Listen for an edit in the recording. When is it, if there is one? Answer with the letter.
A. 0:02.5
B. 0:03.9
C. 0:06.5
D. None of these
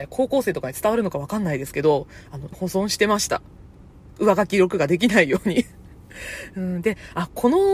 A